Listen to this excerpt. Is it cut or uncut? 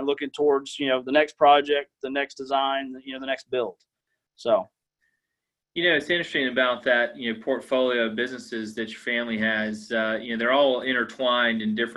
uncut